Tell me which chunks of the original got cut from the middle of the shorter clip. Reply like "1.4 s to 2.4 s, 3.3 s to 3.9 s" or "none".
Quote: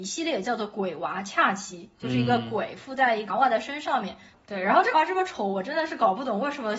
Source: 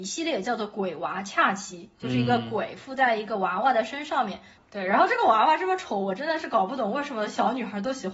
3.3 s to 3.5 s, 5.2 s to 5.5 s